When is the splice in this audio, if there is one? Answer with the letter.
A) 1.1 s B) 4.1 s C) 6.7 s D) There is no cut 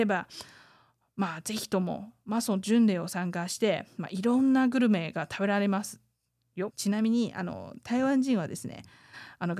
C